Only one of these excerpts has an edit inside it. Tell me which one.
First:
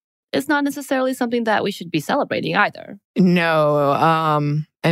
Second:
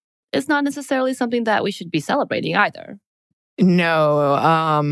first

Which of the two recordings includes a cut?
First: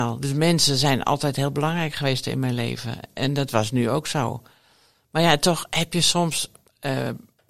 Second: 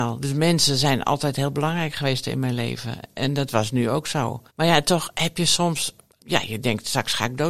second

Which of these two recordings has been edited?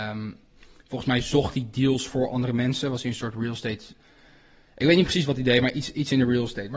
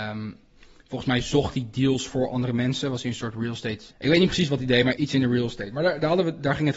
second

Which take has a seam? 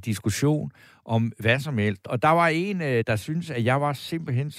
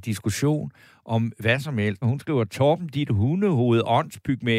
second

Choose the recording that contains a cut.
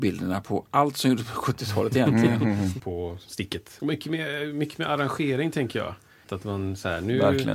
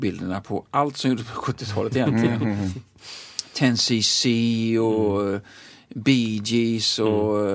first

